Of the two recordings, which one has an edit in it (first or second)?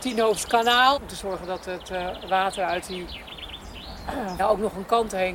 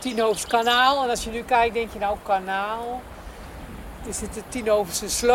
first